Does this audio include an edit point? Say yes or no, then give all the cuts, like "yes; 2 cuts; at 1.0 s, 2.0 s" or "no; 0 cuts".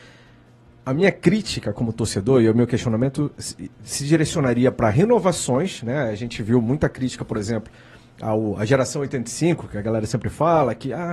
no; 0 cuts